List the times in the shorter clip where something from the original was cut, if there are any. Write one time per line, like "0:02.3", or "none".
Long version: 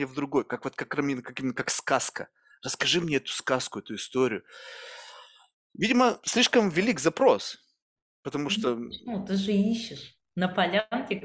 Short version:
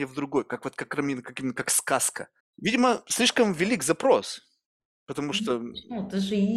0:02.4